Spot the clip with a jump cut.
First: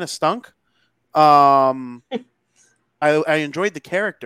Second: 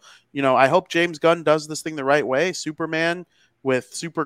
first; 1 cut; at 3.0 s

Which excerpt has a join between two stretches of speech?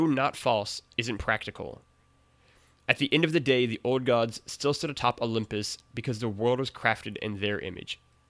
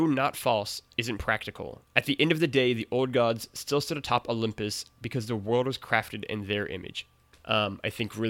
second; 2 cuts; at 1.9 s, 7.3 s

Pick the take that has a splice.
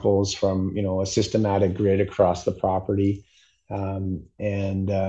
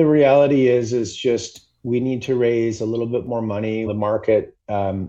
second; 1 cut; at 3.9 s

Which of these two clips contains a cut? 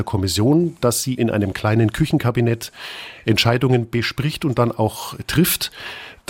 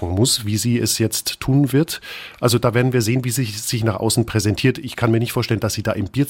first; 1 cut; at 1.2 s

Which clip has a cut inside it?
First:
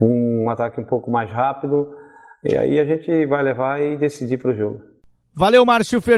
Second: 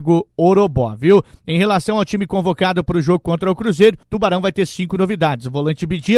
second; 1 cut; at 4.0 s

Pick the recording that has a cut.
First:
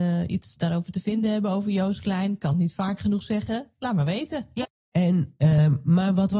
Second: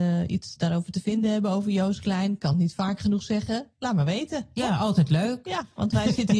first; 1 cut; at 4.6 s

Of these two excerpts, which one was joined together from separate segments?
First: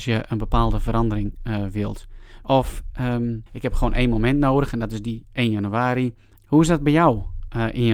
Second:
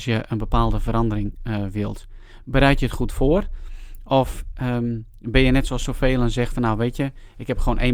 first; 3 cuts; at 2.4 s, 3.5 s, 6.4 s

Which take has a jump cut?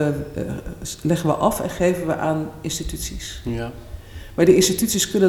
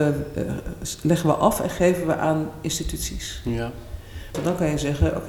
second; 1 cut; at 4.3 s

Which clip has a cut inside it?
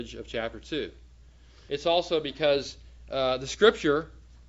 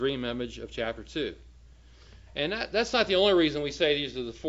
first; 1 cut; at 1.7 s

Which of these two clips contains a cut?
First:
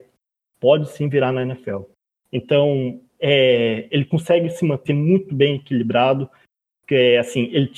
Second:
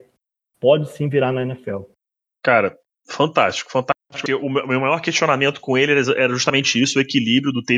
first; 1 cut; at 2.2 s

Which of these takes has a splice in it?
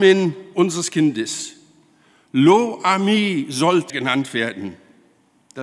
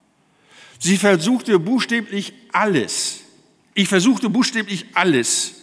first; 1 cut; at 3.9 s

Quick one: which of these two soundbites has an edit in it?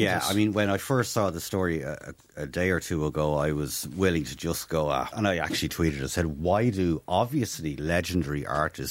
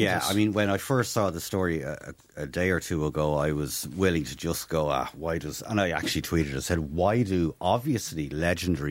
first; 1 cut; at 5.1 s

